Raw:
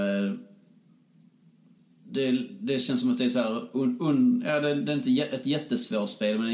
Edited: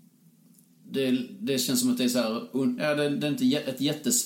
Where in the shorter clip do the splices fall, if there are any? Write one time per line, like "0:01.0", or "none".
0:02.8